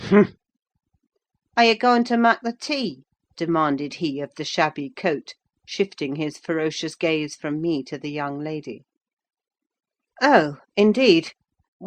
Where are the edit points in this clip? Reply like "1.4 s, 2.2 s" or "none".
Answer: 10.1 s